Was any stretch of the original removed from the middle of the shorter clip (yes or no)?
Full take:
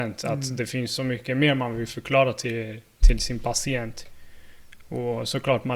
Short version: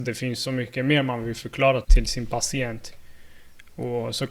yes